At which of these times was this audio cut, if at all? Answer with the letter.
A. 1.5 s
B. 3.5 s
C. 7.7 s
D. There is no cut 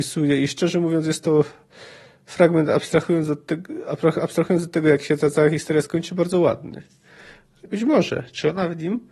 C